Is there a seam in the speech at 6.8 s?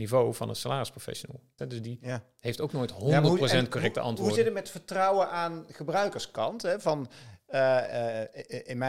no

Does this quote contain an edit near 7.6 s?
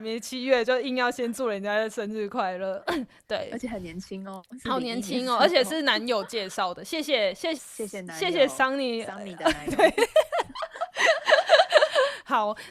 yes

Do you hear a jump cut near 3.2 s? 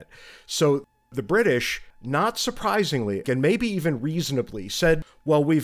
yes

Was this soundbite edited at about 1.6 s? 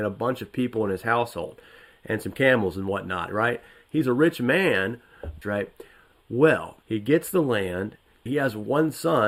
no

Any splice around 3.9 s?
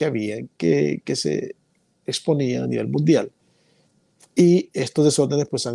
no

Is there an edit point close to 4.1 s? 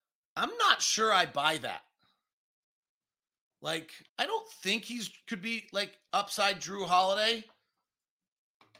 yes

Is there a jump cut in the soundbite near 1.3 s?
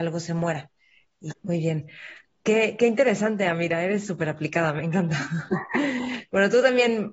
yes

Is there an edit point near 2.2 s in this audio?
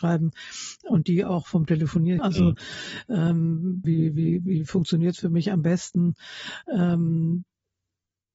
yes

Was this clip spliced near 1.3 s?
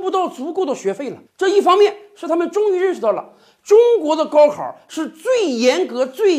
yes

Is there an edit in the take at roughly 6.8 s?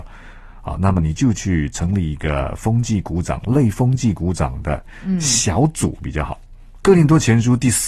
yes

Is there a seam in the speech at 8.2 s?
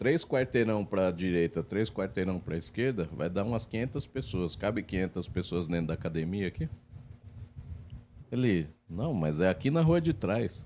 yes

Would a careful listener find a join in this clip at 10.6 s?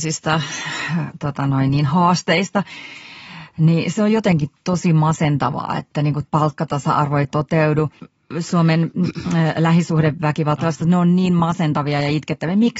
yes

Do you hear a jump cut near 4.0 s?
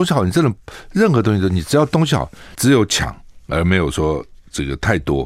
no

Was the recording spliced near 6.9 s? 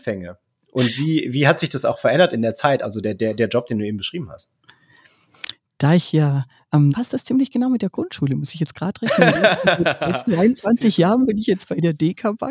yes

